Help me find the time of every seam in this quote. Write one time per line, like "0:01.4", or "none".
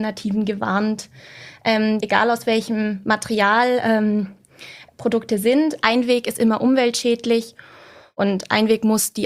0:02.0